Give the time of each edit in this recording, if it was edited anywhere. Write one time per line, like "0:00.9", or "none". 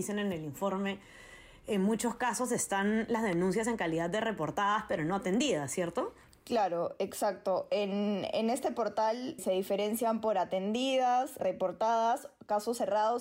0:09.4
0:11.4